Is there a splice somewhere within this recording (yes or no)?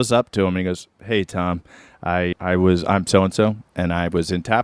yes